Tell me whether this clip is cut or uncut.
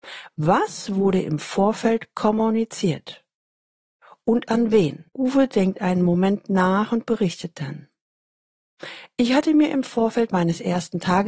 cut